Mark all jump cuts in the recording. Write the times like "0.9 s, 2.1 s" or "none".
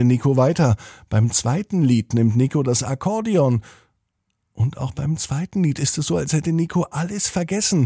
none